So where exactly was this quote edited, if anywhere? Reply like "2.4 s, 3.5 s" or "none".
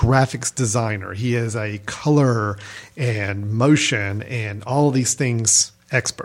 none